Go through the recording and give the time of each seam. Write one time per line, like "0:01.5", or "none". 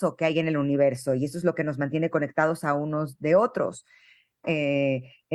0:04.4